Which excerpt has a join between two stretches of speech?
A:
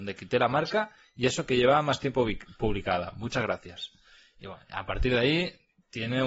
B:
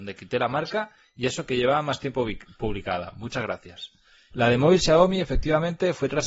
B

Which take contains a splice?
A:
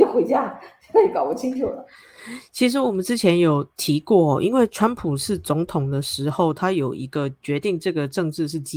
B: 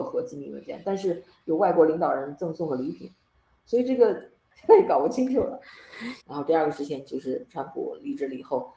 B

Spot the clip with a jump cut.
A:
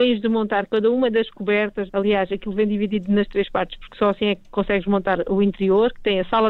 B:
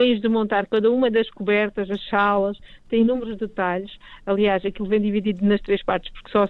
A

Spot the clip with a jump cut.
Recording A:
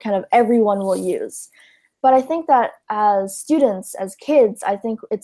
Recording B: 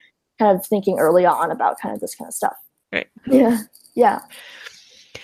B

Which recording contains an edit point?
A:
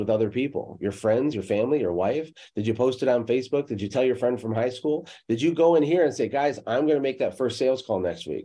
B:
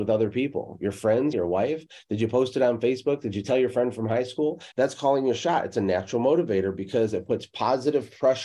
B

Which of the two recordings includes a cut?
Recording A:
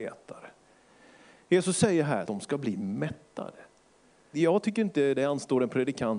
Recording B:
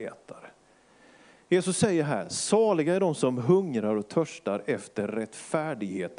A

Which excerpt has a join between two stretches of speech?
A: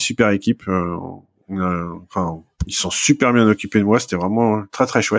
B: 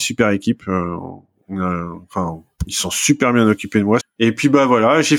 B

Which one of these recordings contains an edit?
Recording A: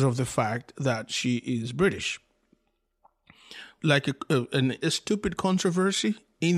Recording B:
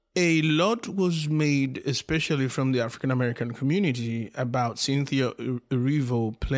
A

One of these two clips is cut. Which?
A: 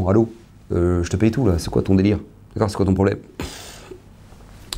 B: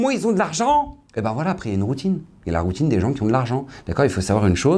B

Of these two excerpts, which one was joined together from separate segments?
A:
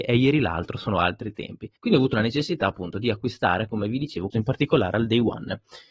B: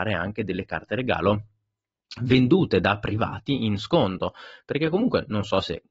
A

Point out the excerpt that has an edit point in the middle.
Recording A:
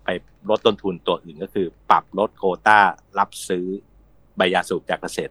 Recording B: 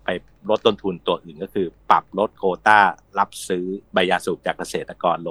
B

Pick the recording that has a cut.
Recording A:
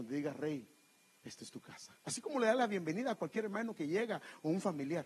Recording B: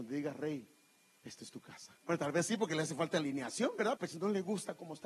B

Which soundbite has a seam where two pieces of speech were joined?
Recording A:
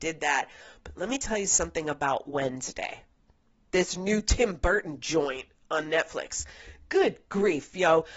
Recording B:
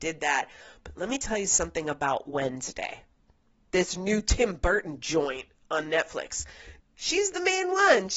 B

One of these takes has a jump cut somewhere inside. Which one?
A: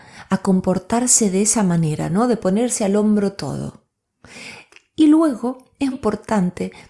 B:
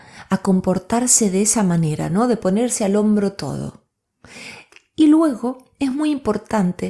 A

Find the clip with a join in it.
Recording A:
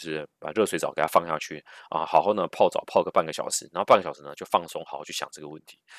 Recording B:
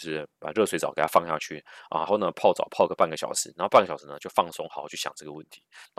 B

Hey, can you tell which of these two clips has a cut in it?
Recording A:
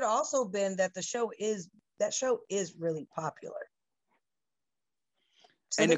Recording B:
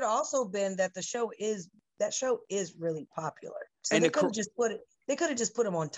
B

